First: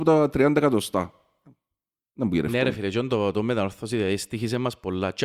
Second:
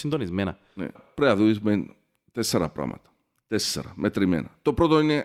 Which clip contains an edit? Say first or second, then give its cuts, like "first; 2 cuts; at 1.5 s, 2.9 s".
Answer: second; 1 cut; at 0.9 s